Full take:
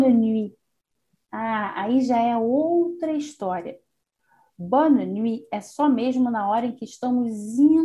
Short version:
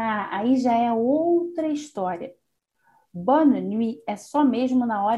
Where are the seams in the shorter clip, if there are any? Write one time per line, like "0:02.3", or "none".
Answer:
none